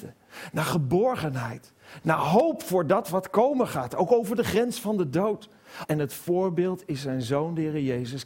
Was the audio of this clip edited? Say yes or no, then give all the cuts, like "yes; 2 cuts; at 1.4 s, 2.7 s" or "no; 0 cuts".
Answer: yes; 2 cuts; at 2.0 s, 5.8 s